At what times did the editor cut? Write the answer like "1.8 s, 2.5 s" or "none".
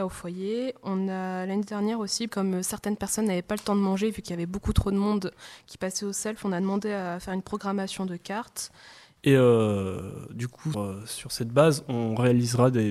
2.3 s, 9.2 s, 10.7 s